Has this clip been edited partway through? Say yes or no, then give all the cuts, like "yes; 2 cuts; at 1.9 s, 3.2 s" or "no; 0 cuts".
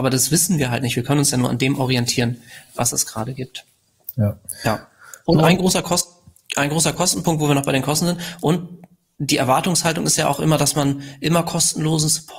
no; 0 cuts